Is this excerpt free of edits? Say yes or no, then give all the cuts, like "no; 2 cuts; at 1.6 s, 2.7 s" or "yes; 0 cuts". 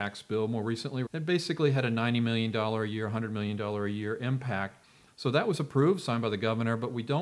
no; 2 cuts; at 1.1 s, 5.1 s